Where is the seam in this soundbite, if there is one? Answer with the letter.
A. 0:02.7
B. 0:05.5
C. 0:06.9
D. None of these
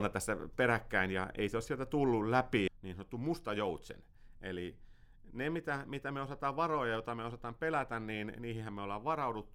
A